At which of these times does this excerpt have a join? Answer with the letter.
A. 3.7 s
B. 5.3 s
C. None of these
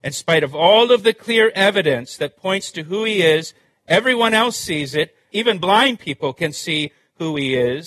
B